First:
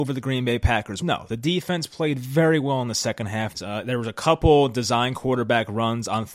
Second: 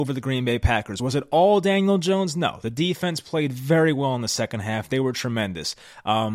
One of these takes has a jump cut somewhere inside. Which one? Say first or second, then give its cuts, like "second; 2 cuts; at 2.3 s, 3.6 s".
first; 2 cuts; at 1.0 s, 3.5 s